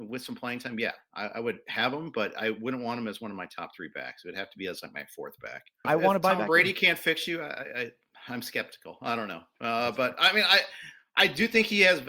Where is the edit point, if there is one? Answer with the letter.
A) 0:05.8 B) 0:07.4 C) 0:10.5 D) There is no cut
A